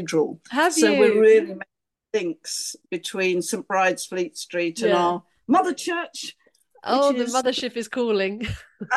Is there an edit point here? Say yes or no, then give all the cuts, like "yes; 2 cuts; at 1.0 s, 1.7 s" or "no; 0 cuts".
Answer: no; 0 cuts